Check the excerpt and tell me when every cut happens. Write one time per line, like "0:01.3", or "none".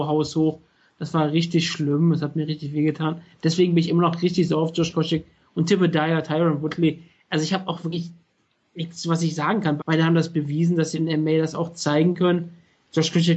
0:09.8